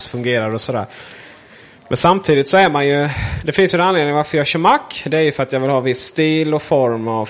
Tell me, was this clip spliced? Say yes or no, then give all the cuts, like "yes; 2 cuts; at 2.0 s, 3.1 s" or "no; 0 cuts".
no; 0 cuts